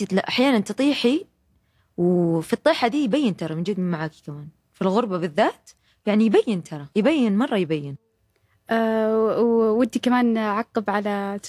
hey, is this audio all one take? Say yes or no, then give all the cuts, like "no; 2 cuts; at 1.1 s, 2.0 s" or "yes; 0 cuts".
no; 1 cut; at 6.9 s